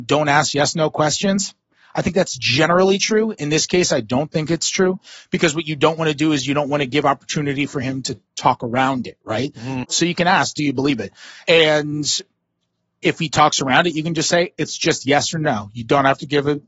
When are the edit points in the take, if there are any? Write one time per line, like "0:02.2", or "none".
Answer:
0:09.8
0:11.3